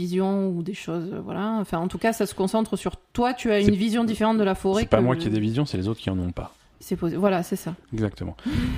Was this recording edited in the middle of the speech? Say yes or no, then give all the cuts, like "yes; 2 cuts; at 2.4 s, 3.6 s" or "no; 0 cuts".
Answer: no; 0 cuts